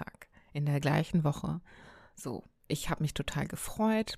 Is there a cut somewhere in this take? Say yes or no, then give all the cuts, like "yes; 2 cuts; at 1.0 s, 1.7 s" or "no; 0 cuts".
no; 0 cuts